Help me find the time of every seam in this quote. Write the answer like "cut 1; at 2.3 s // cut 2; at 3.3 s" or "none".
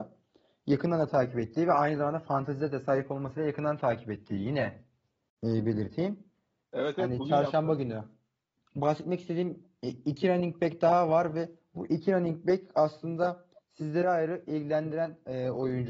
cut 1; at 6.6 s // cut 2; at 14.0 s